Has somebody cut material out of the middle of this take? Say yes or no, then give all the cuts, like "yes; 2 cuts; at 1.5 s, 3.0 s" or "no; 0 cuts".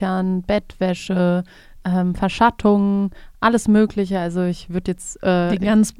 no; 0 cuts